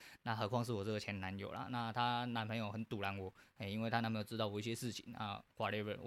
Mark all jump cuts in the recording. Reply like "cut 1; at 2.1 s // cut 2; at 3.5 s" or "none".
none